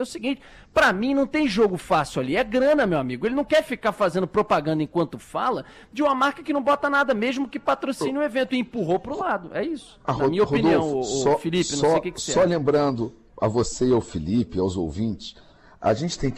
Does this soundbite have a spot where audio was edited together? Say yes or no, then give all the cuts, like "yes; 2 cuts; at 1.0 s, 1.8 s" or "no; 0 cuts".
no; 0 cuts